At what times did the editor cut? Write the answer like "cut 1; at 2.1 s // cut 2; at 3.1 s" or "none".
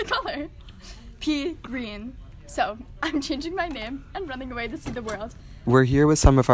cut 1; at 5.6 s